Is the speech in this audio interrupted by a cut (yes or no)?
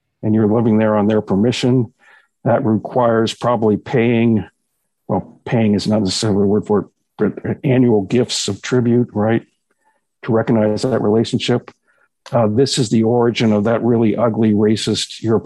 no